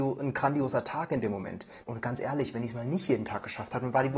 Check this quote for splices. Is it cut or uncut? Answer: cut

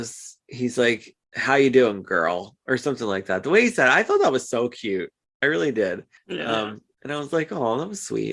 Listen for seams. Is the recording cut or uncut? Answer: uncut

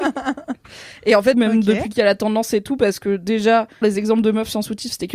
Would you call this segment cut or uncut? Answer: cut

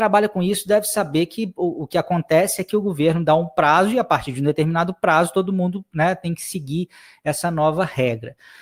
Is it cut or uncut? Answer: uncut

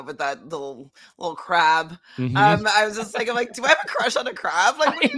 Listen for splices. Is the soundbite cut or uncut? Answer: uncut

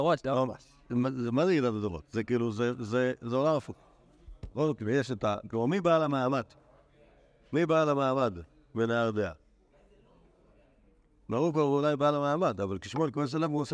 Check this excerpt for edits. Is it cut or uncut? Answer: uncut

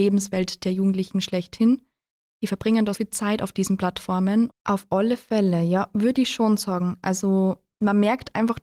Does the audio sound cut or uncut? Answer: cut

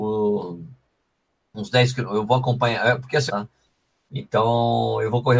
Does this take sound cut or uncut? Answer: cut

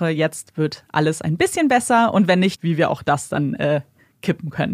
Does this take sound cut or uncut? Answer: cut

